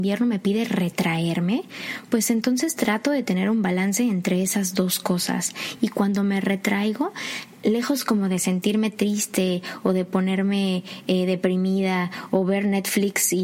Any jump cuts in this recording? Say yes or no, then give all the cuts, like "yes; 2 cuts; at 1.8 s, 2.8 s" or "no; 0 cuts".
no; 0 cuts